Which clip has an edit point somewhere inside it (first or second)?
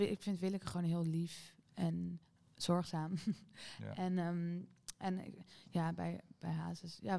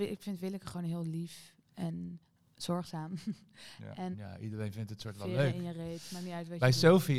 second